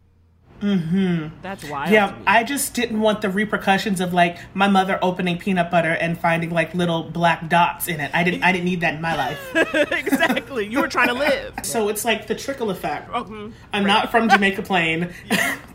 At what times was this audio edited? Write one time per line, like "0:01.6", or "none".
0:11.6
0:13.1